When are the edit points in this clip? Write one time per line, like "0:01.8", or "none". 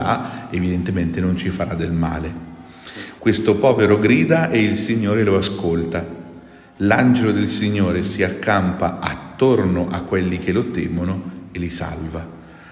0:03.2